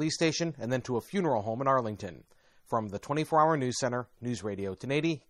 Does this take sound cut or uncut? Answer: cut